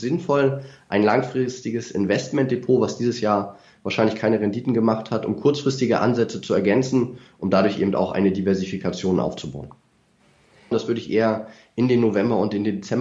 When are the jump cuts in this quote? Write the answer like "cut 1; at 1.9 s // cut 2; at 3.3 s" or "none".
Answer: cut 1; at 10.7 s